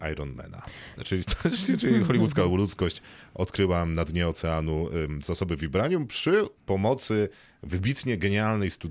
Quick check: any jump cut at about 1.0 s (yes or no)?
yes